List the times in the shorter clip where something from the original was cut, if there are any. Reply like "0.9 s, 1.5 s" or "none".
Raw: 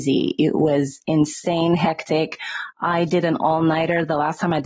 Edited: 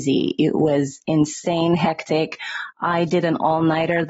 none